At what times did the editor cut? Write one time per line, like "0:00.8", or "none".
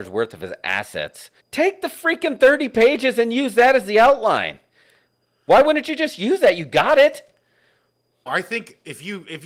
0:01.4
0:08.3